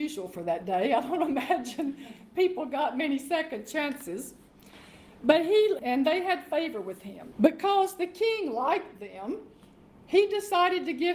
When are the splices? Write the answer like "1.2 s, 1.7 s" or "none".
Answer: 5.8 s, 7.3 s